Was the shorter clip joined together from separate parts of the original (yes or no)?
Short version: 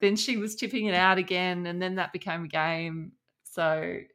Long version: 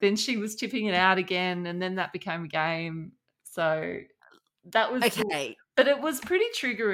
no